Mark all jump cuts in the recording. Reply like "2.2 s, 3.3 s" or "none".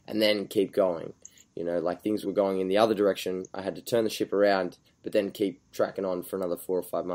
2.2 s